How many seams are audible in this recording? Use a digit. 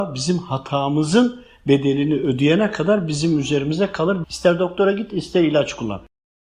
1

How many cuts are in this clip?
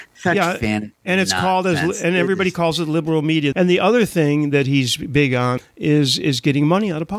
2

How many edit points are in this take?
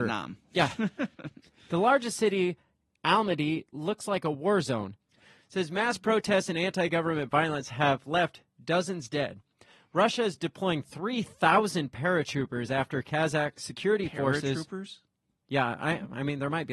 1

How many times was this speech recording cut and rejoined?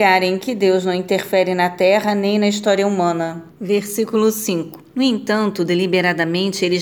2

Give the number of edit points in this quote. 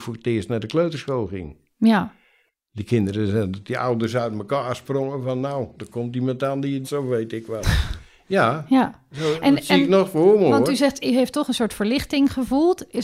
1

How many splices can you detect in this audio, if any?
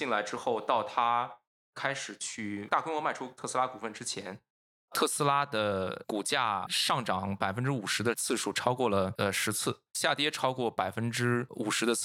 0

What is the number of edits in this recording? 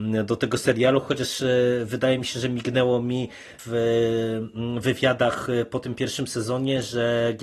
0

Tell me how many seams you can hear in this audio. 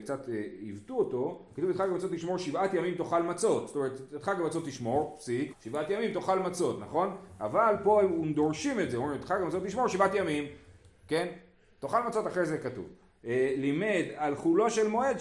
1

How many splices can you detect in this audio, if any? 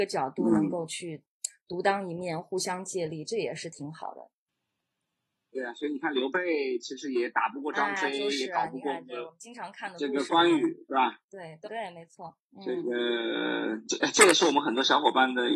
1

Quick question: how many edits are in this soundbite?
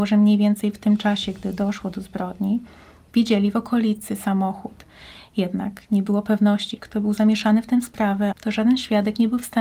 2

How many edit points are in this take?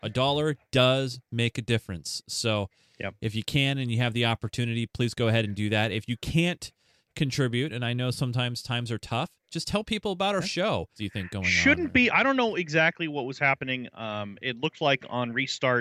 1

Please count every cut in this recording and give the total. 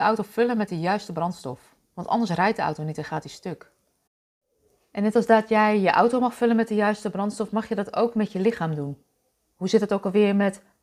1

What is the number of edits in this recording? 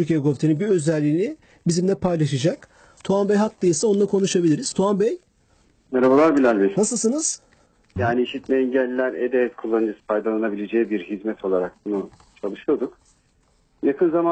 2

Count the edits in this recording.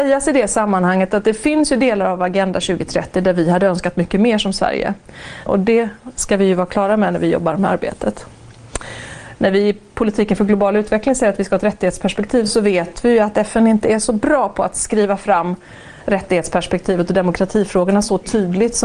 2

